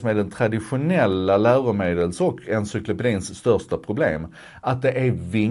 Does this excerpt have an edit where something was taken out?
no; 0 cuts

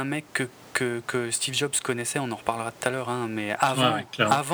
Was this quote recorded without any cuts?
yes; 0 cuts

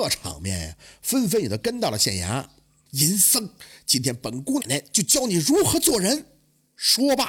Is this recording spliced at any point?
yes; 2 cuts; at 2.9 s, 4.6 s

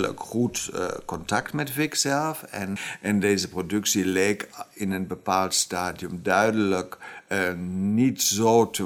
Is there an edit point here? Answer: no; 0 cuts

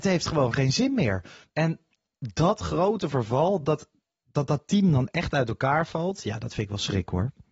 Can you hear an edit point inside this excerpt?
no; 0 cuts

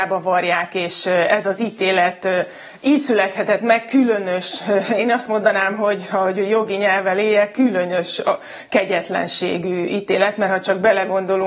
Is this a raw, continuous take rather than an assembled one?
yes; 0 cuts

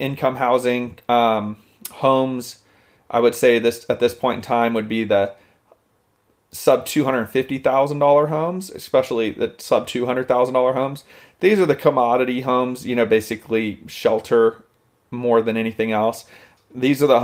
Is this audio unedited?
yes; 0 cuts

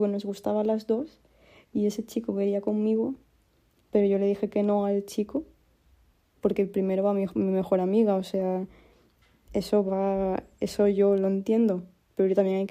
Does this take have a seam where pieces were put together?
no; 0 cuts

